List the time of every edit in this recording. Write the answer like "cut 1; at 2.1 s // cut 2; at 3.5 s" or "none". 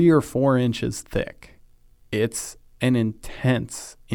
none